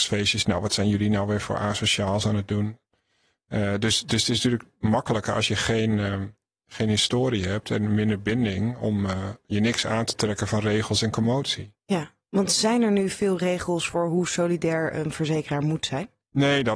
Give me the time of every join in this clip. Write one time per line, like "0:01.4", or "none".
none